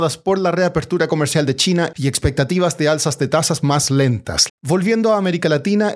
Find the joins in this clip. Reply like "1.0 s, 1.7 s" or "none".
4.5 s